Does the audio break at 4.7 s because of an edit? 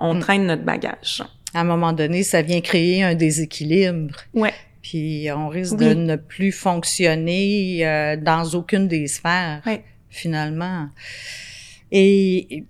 no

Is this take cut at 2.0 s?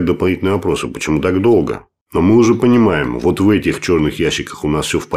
yes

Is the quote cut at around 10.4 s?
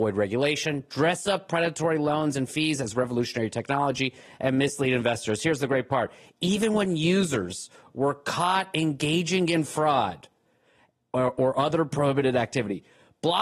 no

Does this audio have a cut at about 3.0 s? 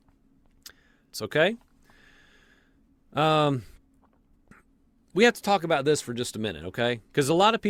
no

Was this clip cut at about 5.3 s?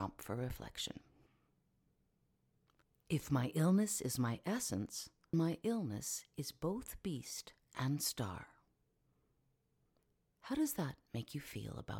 yes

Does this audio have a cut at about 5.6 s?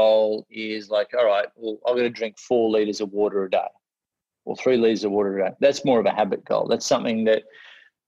no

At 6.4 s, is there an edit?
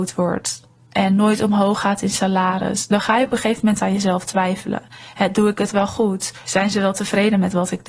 yes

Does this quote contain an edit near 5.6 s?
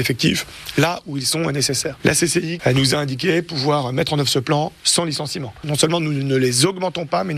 yes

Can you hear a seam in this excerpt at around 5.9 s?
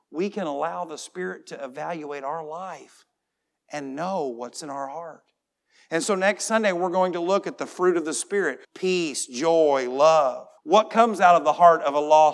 no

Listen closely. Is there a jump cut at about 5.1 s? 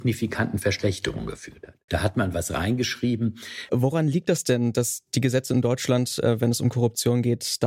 no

